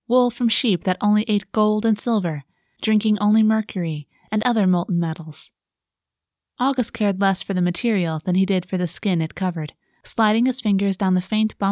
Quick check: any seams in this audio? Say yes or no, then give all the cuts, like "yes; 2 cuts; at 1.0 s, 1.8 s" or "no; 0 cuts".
no; 0 cuts